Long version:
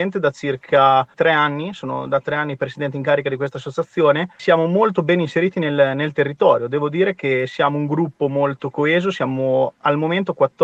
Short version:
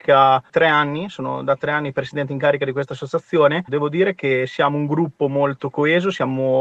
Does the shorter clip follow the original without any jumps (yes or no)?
no